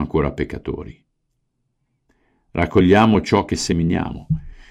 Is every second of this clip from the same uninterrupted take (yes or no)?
yes